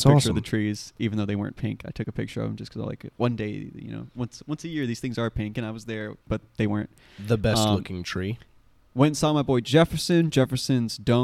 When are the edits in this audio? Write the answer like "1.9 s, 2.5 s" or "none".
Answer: 6.2 s